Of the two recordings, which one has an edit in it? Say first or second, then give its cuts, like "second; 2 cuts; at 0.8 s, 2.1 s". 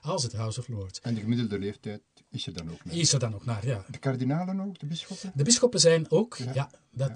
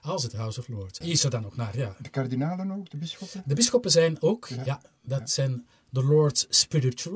second; 1 cut; at 1.0 s